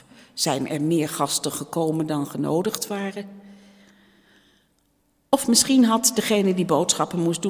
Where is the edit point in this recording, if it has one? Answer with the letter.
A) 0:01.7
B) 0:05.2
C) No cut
C